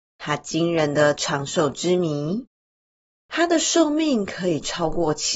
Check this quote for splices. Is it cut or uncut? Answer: cut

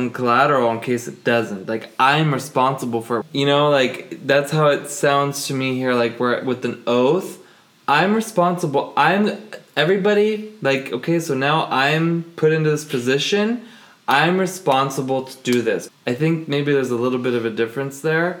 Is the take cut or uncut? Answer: cut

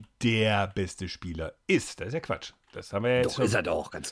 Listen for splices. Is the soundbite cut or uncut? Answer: cut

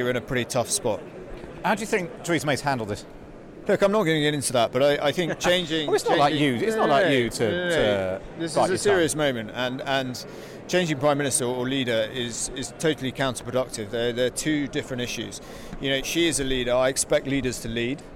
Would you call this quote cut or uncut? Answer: uncut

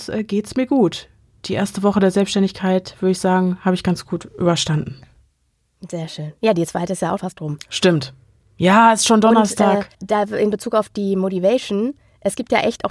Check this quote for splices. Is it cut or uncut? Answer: cut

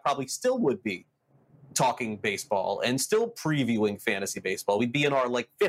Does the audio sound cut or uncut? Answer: uncut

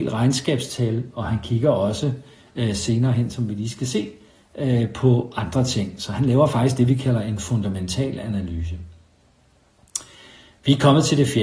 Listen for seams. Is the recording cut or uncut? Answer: uncut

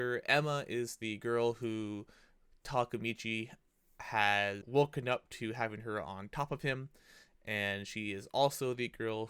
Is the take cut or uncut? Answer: cut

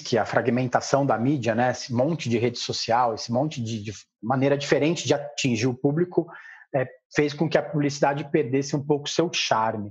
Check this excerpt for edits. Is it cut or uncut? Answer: uncut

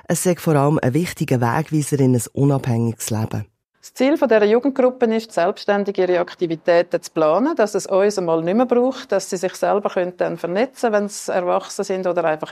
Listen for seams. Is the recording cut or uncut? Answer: cut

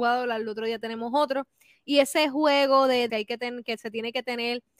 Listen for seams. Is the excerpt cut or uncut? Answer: cut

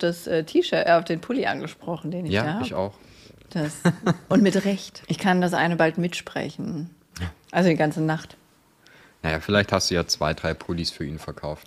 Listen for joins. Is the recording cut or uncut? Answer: cut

